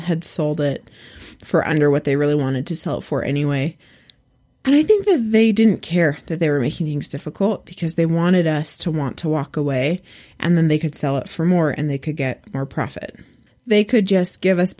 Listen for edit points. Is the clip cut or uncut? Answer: cut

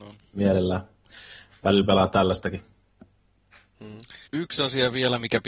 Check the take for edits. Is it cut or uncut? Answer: cut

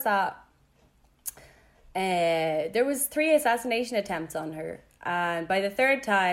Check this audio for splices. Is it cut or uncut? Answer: uncut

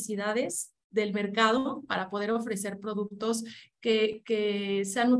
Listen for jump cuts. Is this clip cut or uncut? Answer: uncut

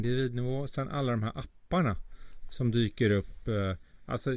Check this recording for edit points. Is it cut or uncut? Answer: uncut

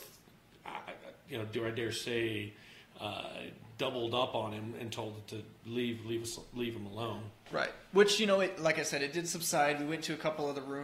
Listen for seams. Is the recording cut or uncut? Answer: uncut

